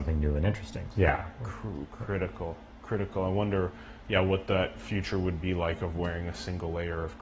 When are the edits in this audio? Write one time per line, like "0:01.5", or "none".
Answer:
0:00.9